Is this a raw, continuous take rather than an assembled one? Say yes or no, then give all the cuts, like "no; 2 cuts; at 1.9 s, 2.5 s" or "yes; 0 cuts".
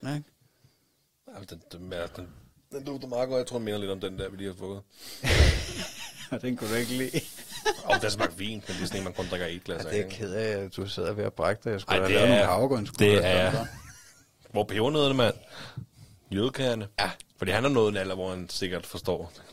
no; 1 cut; at 17.0 s